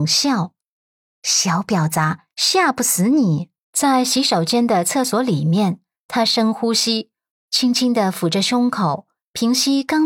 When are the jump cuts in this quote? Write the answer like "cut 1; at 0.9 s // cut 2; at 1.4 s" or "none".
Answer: cut 1; at 3.6 s // cut 2; at 7.3 s